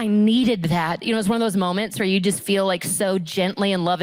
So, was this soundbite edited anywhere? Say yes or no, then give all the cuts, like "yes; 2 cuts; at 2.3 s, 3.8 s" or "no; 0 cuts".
yes; 1 cut; at 1.0 s